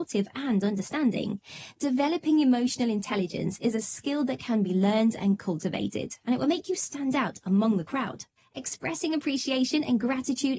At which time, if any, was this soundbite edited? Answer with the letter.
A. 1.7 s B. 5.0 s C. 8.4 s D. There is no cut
C